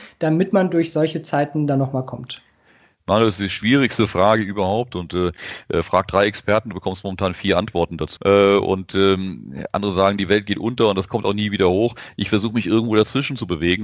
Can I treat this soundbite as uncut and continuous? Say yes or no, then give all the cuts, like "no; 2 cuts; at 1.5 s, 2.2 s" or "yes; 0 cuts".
no; 1 cut; at 8.2 s